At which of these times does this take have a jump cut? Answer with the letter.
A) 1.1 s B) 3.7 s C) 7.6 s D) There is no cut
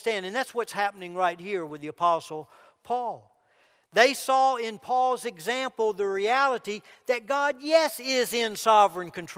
D